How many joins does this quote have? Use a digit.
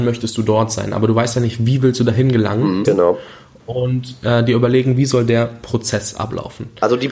1